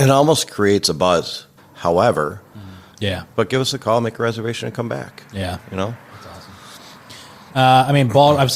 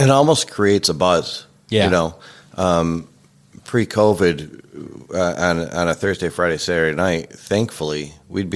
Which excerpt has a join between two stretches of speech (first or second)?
first